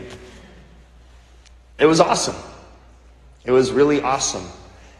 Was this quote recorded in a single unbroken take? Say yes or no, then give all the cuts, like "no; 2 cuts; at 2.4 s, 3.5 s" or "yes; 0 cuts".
yes; 0 cuts